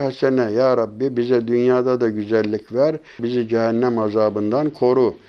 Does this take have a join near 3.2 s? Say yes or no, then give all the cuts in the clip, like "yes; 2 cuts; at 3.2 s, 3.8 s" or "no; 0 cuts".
yes; 1 cut; at 3.2 s